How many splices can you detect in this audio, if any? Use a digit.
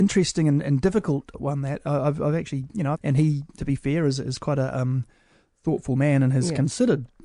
2